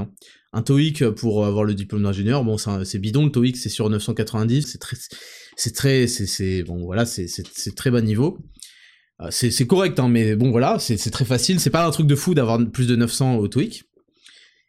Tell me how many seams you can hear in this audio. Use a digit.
1